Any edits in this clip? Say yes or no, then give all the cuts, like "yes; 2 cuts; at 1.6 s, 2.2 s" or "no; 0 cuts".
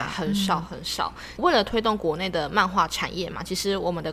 yes; 1 cut; at 1.4 s